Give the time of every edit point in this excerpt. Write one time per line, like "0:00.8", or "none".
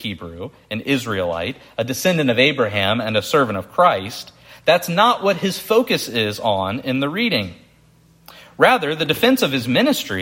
none